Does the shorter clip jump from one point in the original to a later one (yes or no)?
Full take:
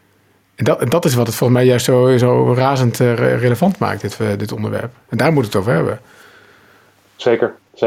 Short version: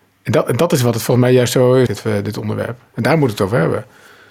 yes